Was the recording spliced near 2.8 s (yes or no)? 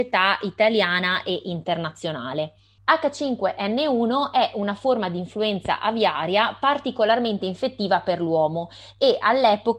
yes